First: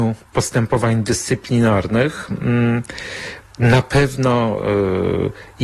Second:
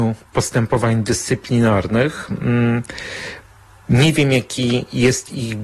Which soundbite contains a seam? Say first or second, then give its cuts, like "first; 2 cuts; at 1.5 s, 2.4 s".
first; 1 cut; at 3.5 s